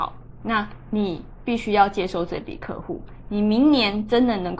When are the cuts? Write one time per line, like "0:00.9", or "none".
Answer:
none